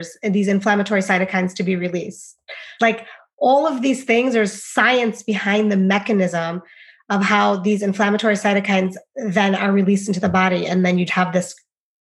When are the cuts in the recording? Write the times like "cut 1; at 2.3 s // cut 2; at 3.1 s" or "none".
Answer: cut 1; at 2.8 s // cut 2; at 11.1 s